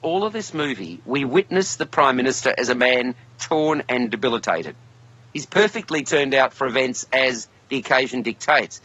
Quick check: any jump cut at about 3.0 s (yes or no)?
no